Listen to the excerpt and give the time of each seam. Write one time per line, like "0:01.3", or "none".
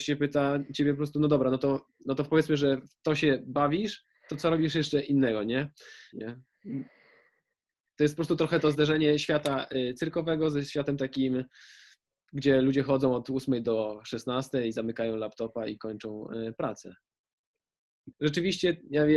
0:06.1
0:18.1